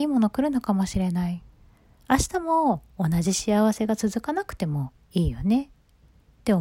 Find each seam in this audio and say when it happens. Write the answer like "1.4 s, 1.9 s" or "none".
2.0 s